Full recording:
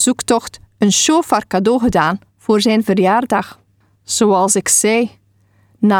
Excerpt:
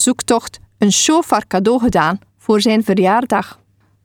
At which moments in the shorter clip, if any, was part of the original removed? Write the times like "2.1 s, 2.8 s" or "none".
none